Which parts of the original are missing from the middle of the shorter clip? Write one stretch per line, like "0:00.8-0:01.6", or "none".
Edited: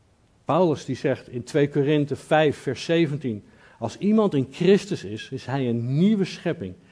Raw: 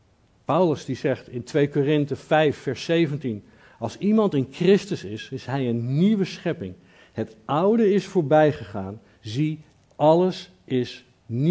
none